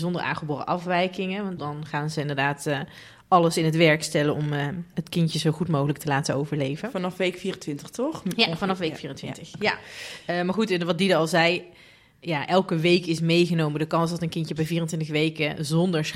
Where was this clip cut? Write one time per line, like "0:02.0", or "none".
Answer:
none

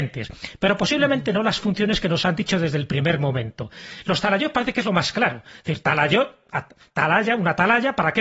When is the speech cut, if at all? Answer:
none

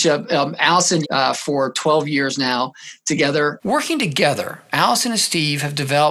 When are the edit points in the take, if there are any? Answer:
0:01.0
0:03.6

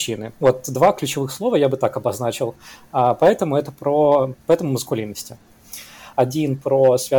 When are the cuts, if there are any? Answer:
0:06.1

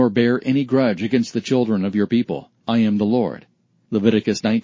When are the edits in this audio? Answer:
0:02.6

